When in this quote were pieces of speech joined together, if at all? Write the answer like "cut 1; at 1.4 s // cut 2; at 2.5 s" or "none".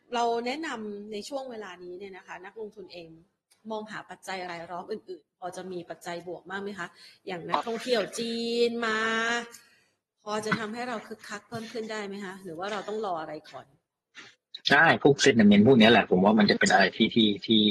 none